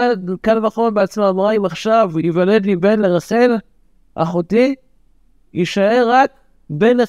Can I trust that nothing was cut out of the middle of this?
yes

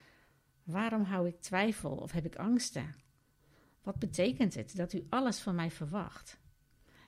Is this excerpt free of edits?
yes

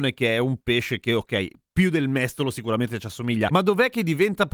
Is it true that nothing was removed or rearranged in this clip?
no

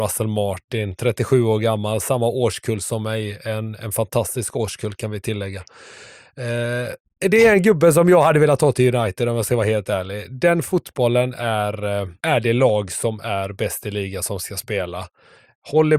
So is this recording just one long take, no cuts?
no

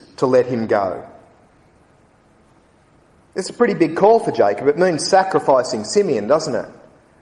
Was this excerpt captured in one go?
yes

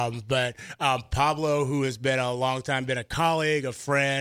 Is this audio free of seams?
yes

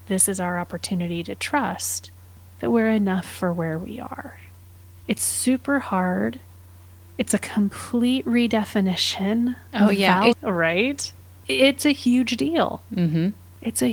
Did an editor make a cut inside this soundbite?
yes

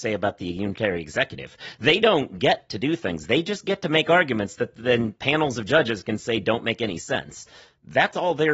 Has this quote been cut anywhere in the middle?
no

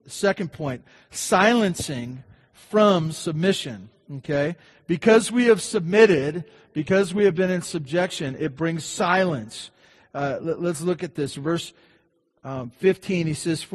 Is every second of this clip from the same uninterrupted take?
yes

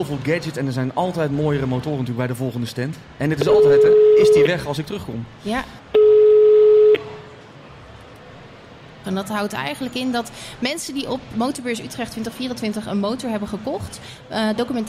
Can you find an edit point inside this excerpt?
yes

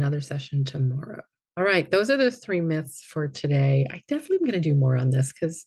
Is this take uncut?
yes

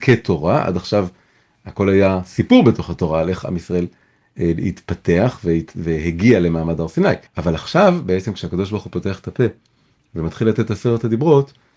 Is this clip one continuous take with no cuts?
no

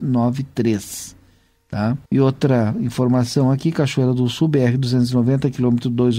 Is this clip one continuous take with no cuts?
no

